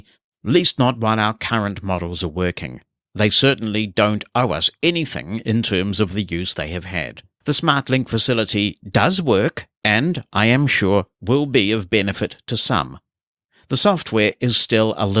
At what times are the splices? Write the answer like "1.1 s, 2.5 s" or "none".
3.1 s, 7.4 s